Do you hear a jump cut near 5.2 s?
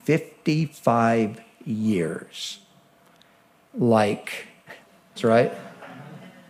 yes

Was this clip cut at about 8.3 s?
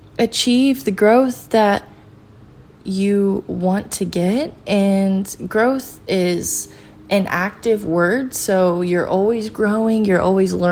no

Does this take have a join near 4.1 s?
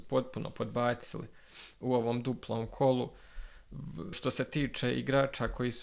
yes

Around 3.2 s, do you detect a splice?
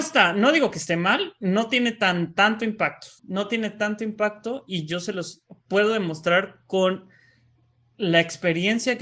yes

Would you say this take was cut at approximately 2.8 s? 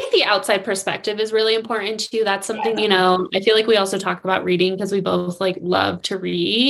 yes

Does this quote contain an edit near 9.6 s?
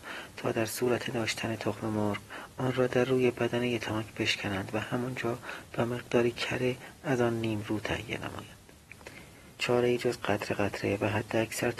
yes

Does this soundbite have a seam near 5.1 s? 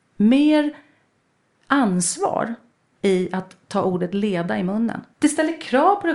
yes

